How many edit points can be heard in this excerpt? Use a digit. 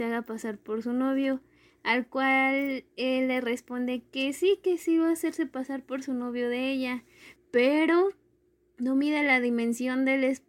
1